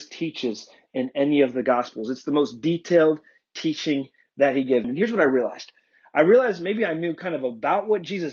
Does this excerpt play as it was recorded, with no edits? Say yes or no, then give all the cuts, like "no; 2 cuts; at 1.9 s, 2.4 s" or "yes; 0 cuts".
no; 1 cut; at 4.8 s